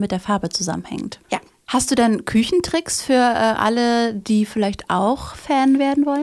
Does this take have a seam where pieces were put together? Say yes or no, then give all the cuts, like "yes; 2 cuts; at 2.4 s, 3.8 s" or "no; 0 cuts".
no; 0 cuts